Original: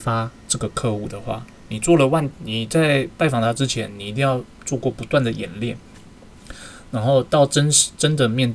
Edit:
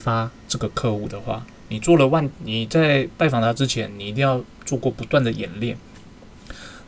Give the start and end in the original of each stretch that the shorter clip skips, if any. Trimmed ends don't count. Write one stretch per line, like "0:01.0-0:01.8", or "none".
none